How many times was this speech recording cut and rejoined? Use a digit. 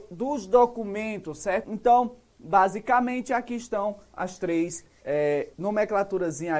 2